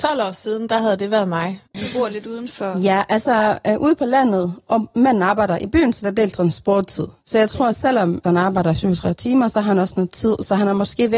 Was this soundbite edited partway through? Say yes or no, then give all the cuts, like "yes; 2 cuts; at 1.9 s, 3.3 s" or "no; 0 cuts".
yes; 2 cuts; at 1.7 s, 8.2 s